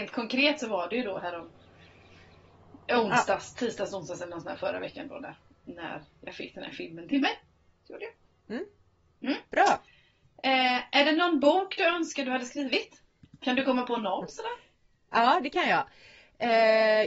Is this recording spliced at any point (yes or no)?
yes